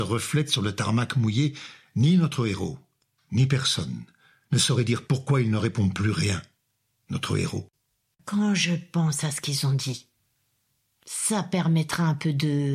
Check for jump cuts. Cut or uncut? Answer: cut